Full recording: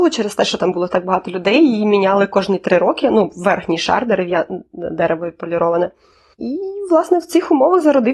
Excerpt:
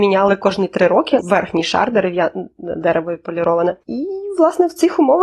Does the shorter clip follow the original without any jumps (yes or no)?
no